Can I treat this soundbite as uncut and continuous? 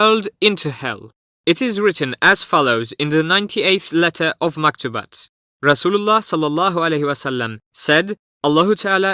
yes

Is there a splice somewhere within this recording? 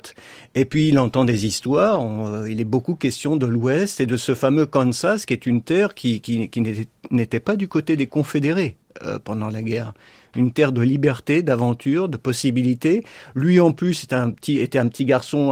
no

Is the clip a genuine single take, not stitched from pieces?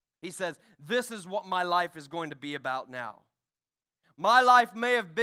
yes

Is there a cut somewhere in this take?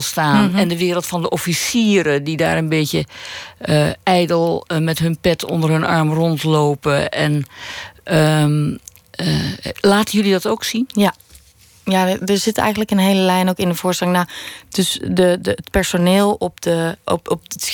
no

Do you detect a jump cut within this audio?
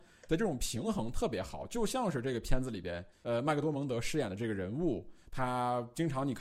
no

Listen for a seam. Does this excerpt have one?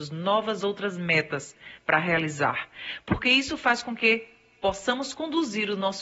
no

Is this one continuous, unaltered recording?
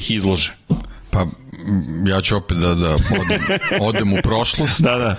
yes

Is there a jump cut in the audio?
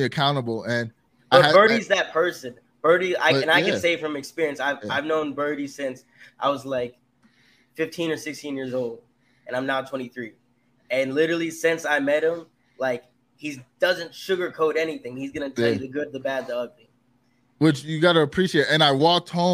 no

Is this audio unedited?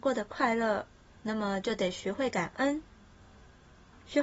no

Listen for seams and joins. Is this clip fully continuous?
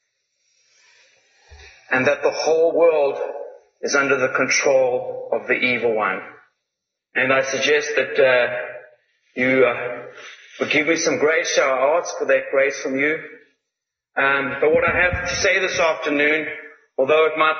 no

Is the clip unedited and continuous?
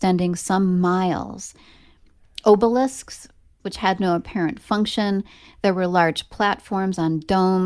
no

